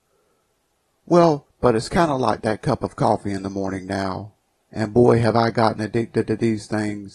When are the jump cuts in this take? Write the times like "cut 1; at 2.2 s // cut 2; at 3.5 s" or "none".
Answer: cut 1; at 1.5 s // cut 2; at 4.6 s